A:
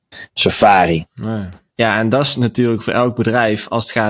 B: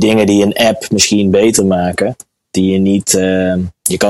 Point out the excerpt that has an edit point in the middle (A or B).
A